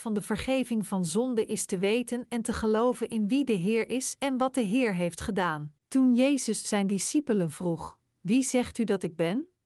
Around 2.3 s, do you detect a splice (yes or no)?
no